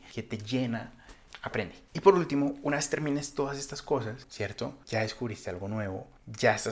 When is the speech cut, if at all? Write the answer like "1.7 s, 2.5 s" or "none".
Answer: 1.9 s, 4.2 s

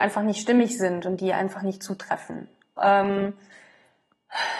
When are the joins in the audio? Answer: 2.8 s

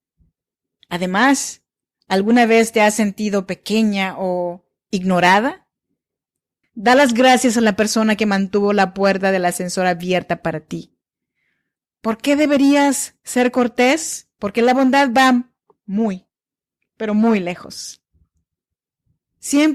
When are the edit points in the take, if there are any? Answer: 6.6 s, 14.3 s

